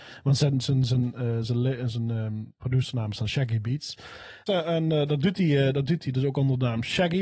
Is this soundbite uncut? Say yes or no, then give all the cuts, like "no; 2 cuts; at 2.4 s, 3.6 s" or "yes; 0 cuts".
no; 1 cut; at 4.5 s